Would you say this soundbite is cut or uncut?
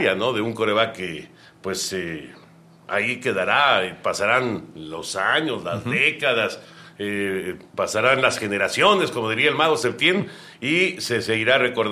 uncut